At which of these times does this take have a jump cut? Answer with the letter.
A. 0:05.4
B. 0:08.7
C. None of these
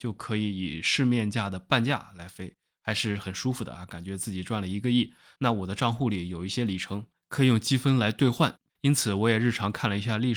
A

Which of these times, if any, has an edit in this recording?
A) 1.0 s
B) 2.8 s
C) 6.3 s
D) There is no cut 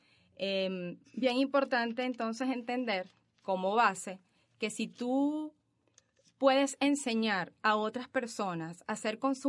A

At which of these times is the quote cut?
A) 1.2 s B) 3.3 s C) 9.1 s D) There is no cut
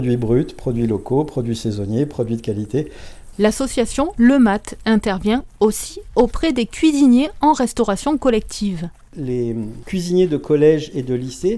B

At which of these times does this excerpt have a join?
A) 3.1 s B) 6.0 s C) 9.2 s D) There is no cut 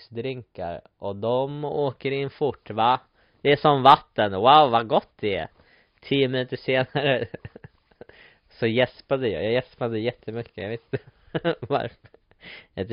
D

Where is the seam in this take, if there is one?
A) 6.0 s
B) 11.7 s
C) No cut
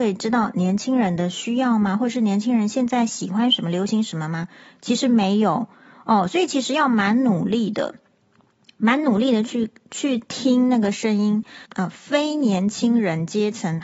B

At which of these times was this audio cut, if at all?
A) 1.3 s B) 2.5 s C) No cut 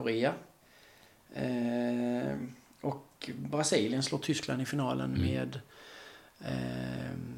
C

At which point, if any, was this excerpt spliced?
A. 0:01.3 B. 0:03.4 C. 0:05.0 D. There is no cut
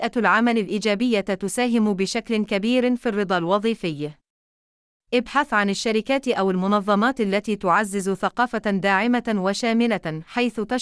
D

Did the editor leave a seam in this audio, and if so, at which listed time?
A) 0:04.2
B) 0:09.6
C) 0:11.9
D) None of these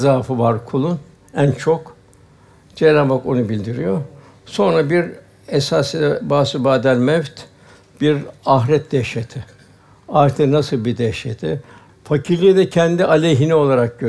C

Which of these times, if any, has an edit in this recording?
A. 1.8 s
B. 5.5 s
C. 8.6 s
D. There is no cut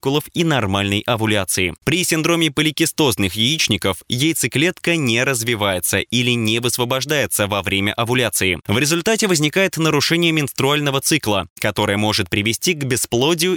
A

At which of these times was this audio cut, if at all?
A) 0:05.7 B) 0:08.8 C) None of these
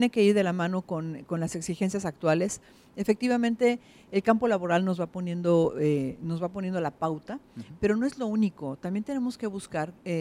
C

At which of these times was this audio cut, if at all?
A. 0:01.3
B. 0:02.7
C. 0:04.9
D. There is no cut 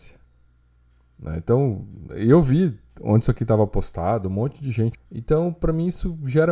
C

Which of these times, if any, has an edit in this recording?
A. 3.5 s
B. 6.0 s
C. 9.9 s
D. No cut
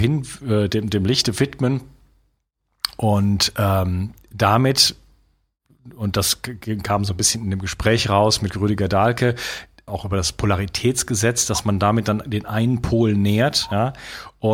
C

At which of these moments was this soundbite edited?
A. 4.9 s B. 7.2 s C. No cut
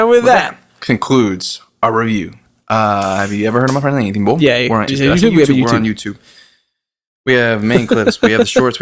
A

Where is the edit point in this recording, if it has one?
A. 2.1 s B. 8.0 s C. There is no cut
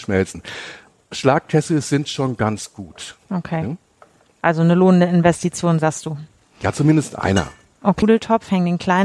B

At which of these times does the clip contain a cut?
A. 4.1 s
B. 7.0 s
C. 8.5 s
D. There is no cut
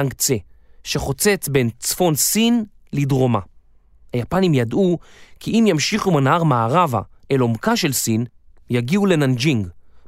A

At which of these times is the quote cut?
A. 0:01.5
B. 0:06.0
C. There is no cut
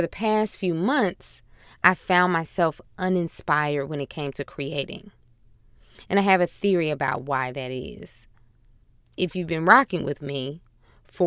C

